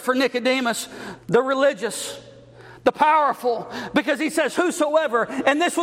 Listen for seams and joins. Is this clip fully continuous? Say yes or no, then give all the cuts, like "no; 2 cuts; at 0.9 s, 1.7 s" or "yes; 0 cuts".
no; 1 cut; at 1.2 s